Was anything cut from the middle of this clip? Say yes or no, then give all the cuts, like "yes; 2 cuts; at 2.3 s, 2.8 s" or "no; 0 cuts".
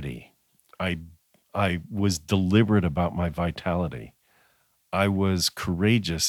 no; 0 cuts